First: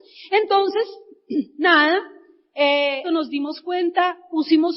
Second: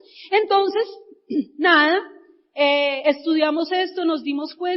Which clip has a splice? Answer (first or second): first